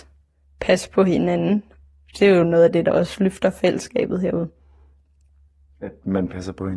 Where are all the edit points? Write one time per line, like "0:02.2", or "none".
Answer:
none